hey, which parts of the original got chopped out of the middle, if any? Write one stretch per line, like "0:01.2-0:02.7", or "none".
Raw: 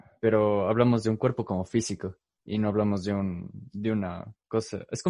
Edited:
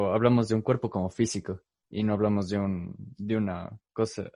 none